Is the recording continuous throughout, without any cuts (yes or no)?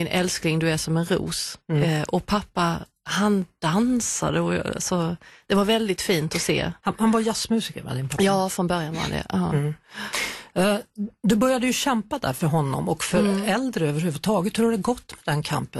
yes